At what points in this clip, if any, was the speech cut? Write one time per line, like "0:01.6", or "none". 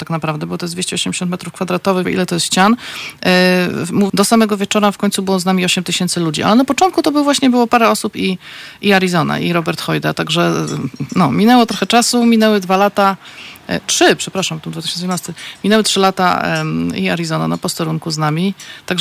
0:02.0
0:04.1

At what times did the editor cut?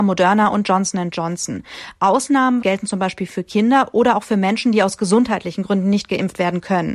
0:02.6

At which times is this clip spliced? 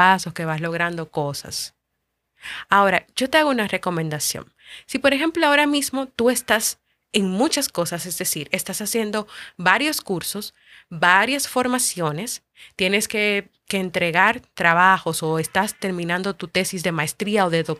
none

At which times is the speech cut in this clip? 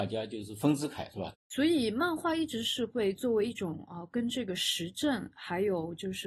0:01.3

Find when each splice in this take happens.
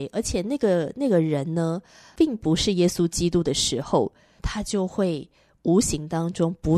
0:04.4

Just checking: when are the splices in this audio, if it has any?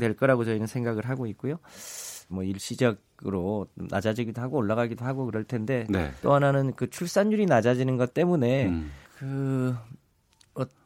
0:02.3
0:06.2
0:09.0

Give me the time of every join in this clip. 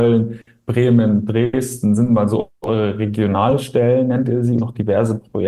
0:04.6

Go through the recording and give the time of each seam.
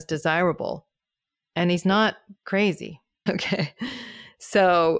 0:03.3

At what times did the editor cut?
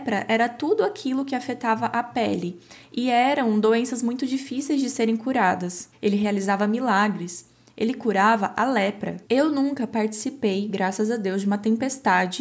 0:05.9
0:09.2

